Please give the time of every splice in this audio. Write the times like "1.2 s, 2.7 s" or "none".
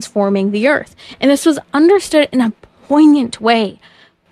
none